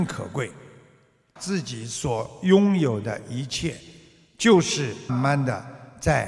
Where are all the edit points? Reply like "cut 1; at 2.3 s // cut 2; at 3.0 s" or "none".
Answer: cut 1; at 1.4 s // cut 2; at 5.1 s

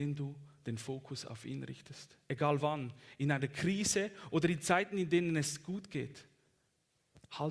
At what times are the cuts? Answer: none

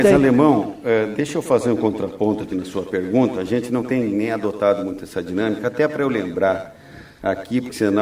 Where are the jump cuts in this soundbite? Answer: none

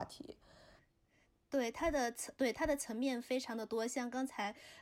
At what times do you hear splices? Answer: none

